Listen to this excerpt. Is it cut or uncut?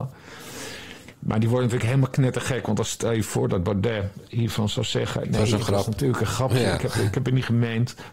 uncut